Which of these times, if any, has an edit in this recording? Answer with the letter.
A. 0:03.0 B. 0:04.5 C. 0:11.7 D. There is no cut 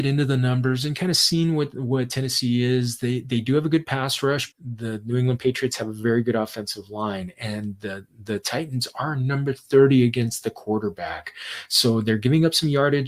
B